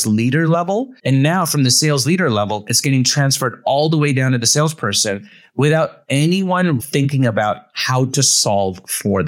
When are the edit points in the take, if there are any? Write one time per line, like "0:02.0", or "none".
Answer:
0:01.0
0:06.8